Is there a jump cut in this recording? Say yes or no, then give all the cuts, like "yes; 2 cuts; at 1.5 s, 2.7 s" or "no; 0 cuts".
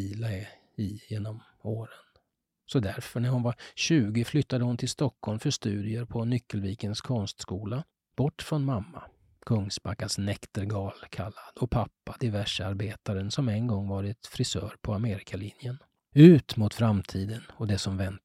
no; 0 cuts